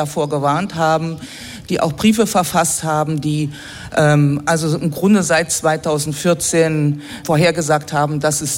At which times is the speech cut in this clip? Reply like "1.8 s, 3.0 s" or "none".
7.2 s

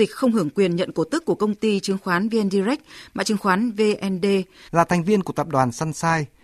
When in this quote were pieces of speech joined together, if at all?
4.7 s

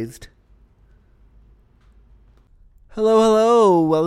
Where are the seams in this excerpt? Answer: none

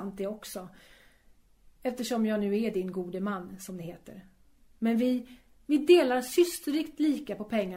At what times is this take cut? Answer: 5.6 s

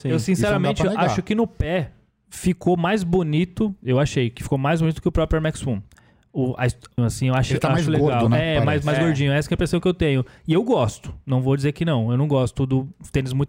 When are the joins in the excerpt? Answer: 7.0 s

